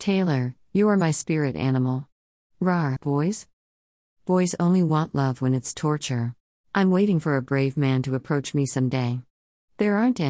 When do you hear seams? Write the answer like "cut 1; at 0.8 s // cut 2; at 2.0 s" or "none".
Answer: cut 1; at 3.0 s // cut 2; at 6.6 s